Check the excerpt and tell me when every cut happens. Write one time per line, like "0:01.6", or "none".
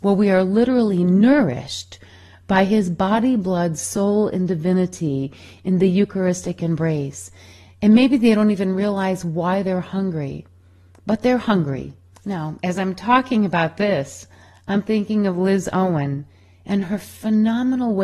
0:12.1